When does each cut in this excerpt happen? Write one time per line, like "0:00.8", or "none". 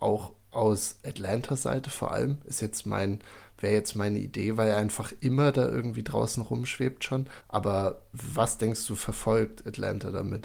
0:07.4

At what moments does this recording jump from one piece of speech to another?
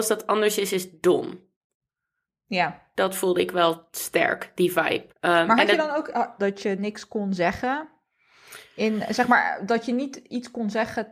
0:05.1
0:06.4

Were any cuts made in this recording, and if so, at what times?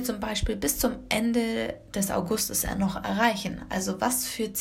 none

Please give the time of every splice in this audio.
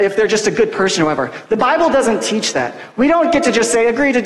none

